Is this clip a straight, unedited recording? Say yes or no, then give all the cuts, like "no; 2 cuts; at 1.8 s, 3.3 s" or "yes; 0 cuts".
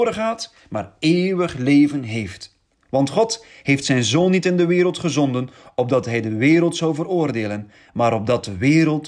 yes; 0 cuts